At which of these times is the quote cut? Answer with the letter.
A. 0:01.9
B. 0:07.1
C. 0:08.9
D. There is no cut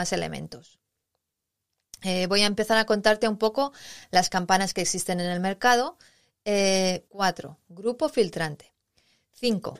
B